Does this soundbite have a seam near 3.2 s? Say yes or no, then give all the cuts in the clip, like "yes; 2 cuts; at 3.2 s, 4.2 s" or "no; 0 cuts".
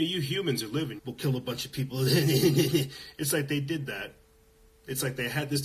no; 1 cut; at 1.0 s